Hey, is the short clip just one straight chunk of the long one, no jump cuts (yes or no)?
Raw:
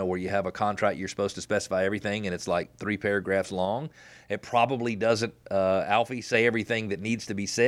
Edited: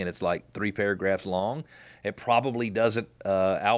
yes